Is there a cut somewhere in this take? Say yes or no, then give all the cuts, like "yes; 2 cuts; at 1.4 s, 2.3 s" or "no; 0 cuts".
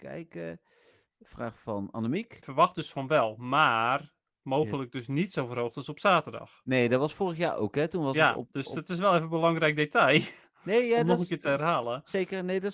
yes; 1 cut; at 2.4 s